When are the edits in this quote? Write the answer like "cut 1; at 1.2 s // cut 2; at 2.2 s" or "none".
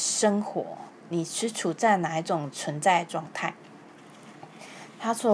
none